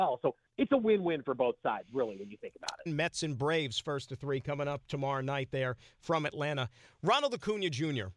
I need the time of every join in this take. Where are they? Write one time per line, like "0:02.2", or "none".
0:02.9